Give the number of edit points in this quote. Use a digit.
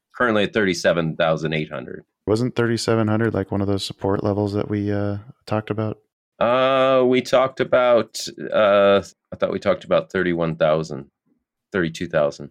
1